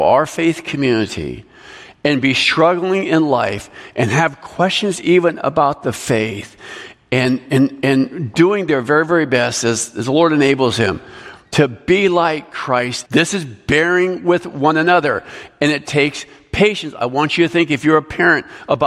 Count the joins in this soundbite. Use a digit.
2